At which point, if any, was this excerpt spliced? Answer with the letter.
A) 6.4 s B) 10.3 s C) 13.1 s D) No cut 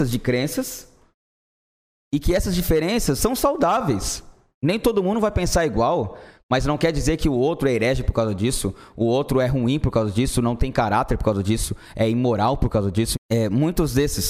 C